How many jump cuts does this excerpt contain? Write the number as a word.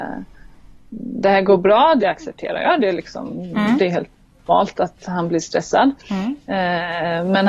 one